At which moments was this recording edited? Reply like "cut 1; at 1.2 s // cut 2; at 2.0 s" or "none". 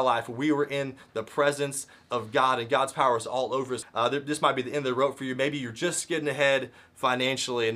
cut 1; at 3.8 s